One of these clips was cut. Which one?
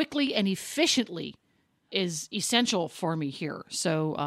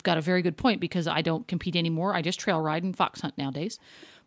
first; 1 cut; at 1.9 s

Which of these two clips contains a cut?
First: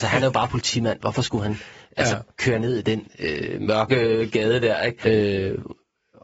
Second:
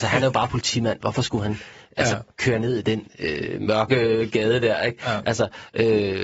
first; 1 cut; at 5.0 s

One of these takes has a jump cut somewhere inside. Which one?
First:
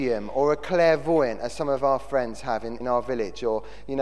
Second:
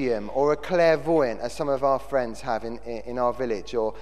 first; 1 cut; at 2.8 s

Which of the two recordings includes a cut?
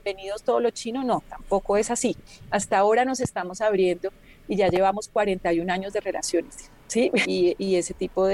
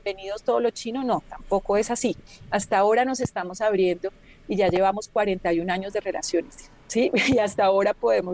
first; 1 cut; at 7.2 s

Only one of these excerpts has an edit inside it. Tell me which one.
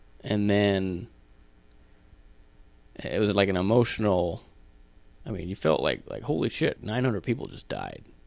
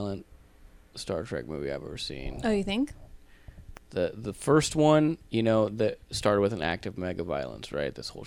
first; 1 cut; at 6.8 s

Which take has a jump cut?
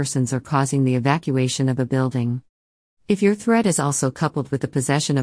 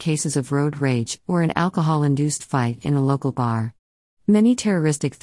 first; 1 cut; at 2.9 s

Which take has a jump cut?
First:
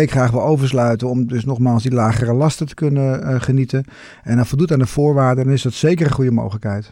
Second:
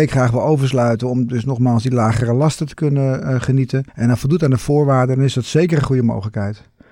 second; 1 cut; at 3.9 s

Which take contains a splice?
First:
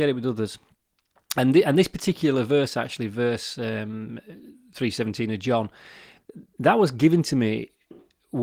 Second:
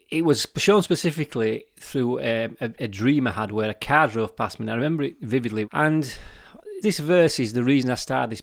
second; 2 cuts; at 5.6 s, 6.8 s

